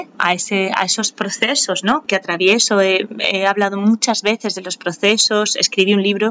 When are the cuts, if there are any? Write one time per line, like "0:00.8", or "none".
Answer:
none